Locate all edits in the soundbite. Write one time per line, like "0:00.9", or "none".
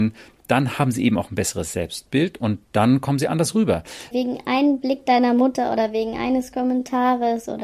0:04.1